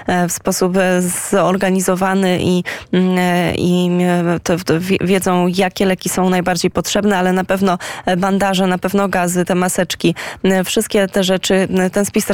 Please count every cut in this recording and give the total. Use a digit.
1